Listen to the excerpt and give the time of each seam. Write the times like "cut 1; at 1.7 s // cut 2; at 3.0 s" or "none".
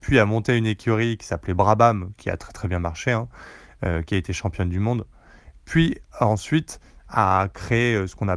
none